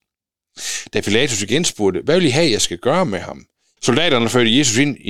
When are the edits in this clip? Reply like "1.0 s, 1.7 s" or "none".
3.8 s